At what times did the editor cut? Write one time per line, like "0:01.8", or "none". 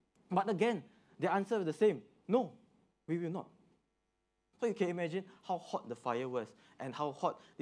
0:04.5